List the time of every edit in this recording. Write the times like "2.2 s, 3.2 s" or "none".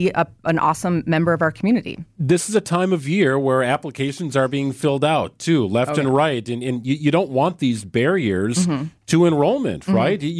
none